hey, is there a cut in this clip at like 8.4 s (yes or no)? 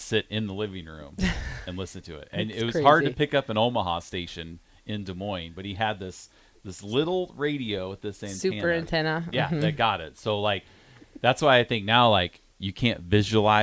no